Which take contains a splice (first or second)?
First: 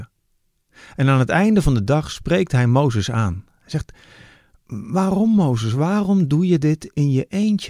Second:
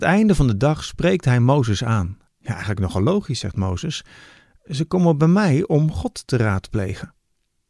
second